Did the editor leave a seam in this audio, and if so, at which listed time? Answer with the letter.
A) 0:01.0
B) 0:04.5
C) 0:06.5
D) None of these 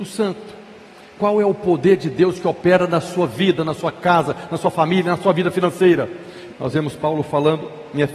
C